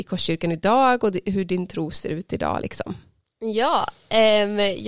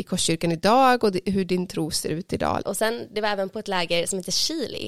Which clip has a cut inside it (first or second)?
second